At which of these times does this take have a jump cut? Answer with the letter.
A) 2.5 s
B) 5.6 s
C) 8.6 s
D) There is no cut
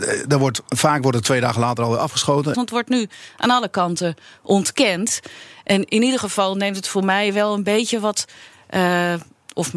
A